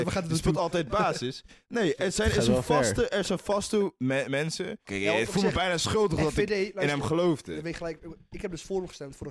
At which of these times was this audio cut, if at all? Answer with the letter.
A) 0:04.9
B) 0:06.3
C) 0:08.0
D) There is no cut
A